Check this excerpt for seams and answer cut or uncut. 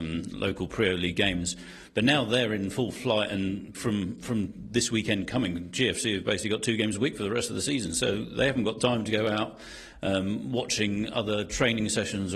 cut